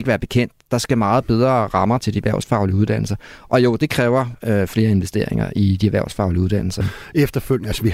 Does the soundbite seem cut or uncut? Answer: cut